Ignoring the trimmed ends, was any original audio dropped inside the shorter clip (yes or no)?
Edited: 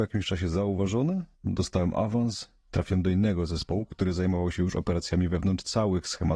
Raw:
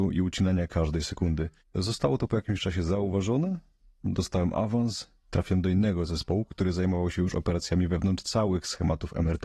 yes